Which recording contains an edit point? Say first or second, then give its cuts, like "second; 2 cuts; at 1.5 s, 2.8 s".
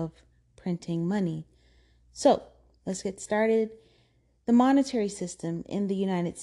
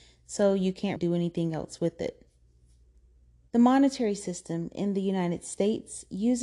second; 2 cuts; at 1.0 s, 3.5 s